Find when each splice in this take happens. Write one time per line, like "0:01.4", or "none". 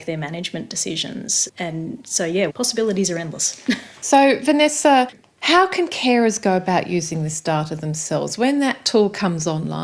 0:02.5